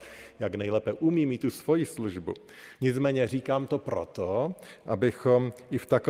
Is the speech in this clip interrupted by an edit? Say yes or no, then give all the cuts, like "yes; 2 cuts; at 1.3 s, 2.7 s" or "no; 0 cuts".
yes; 1 cut; at 2.8 s